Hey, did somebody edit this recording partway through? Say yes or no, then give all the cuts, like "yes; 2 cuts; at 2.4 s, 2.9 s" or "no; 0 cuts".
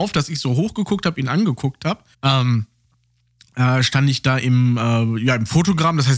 yes; 1 cut; at 2.1 s